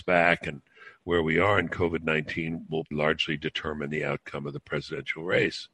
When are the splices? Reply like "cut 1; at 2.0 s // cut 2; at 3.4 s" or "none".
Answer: cut 1; at 2.9 s